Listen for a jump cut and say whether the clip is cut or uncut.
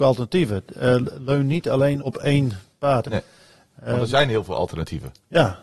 cut